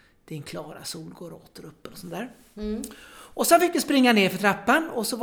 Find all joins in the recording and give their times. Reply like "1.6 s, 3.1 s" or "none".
none